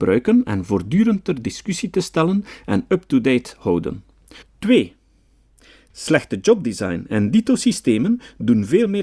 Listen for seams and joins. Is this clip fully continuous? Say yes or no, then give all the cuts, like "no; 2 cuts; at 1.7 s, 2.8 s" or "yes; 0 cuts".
no; 1 cut; at 4.4 s